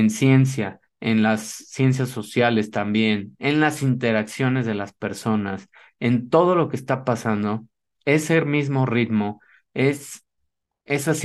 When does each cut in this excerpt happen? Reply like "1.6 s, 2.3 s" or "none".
0.9 s